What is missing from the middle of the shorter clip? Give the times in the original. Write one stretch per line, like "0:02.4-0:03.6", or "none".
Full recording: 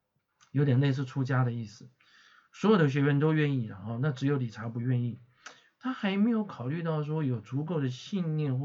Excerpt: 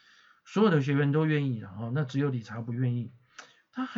none